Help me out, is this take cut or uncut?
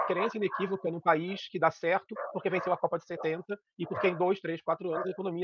uncut